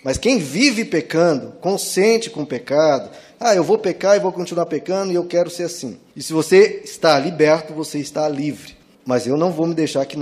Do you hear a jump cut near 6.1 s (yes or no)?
yes